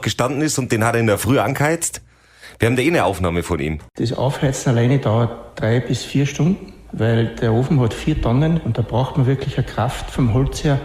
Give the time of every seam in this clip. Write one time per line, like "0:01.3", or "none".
none